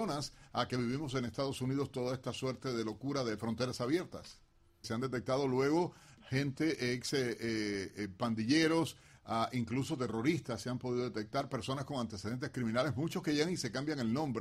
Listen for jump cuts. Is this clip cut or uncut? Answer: cut